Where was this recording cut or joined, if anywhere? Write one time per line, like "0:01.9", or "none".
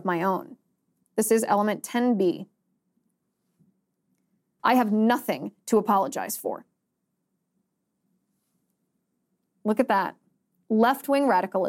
0:01.0
0:04.6